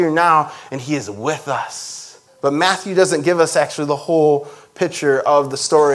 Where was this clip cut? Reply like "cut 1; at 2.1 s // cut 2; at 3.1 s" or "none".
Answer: cut 1; at 2.3 s